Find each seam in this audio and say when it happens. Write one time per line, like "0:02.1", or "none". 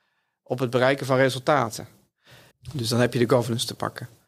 0:02.5